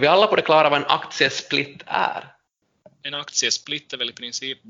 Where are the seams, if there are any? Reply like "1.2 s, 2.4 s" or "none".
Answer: none